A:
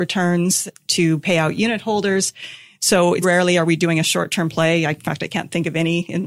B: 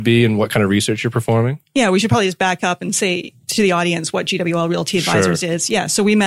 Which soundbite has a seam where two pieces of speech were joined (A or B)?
A